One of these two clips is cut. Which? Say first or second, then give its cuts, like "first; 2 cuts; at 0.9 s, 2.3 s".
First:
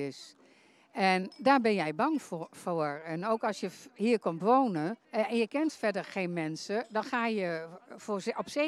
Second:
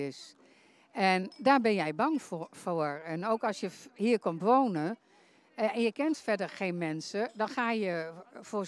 first; 1 cut; at 5.0 s